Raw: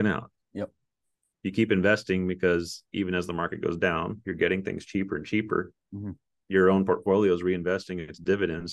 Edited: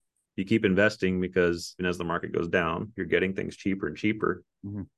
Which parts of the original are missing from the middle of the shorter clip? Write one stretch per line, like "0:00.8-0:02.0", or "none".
0:02.9-0:03.1